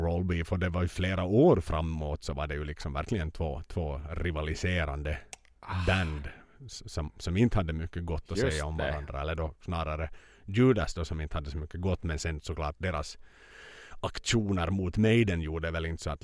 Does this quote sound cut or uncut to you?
uncut